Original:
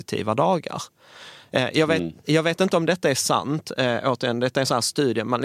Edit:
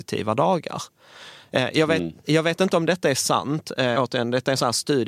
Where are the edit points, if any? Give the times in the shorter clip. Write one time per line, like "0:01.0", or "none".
0:04.0